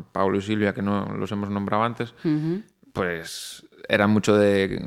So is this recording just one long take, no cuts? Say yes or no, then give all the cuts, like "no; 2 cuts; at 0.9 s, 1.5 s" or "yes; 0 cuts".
yes; 0 cuts